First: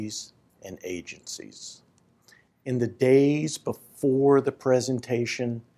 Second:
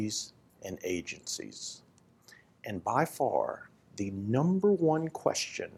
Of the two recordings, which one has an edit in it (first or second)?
first